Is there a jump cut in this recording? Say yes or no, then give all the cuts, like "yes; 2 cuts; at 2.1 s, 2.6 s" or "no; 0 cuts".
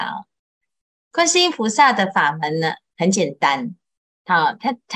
no; 0 cuts